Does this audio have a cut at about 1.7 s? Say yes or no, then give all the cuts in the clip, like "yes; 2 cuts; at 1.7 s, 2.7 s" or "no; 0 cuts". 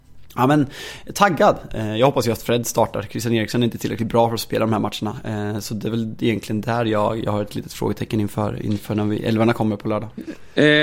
yes; 1 cut; at 1.7 s